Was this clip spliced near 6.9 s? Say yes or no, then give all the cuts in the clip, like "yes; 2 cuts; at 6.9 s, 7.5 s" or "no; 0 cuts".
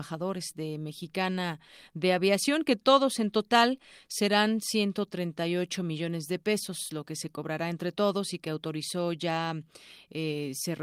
no; 0 cuts